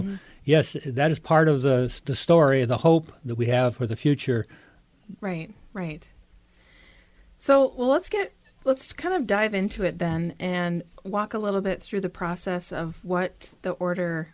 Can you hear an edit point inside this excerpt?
yes; 1 cut; at 5.2 s

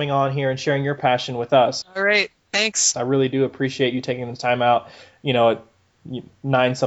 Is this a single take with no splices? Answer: no; 2 cuts; at 1.8 s, 2.9 s

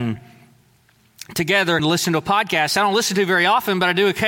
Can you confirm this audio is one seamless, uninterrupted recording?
no; 1 cut; at 1.8 s

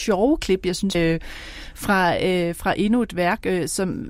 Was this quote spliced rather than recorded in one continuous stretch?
yes; 1 cut; at 0.9 s

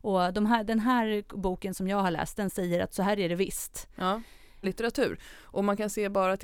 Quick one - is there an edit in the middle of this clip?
yes; 1 cut; at 4.6 s

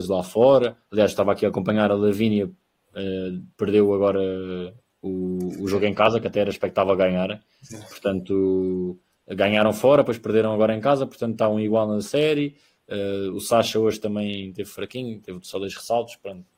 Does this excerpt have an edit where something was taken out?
no; 0 cuts

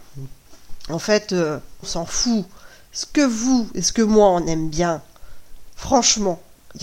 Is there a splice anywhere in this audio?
yes; 2 cuts; at 1.8 s, 5.8 s

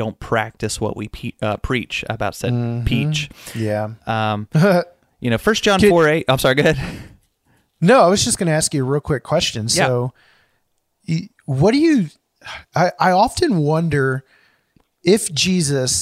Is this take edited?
no; 0 cuts

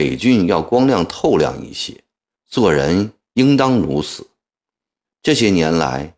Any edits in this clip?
yes; 2 cuts; at 2.3 s, 5.0 s

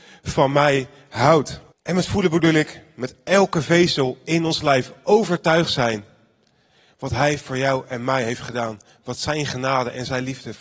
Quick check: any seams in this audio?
yes; 1 cut; at 1.7 s

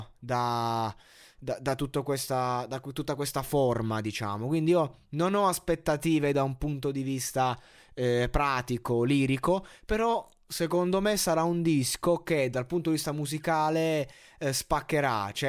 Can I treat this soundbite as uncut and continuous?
yes; 0 cuts

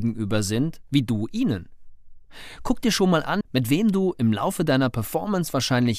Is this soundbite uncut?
no; 1 cut; at 3.4 s

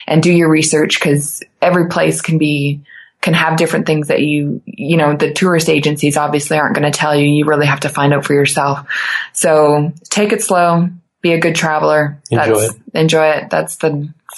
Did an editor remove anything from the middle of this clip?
no; 0 cuts

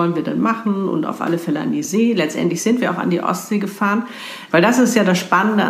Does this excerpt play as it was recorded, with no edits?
no; 1 cut; at 4.5 s

